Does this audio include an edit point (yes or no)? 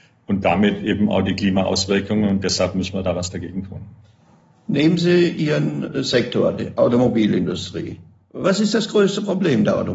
no